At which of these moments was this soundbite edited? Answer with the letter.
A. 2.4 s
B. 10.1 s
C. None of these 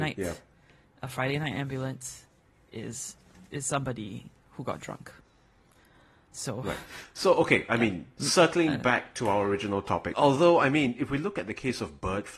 B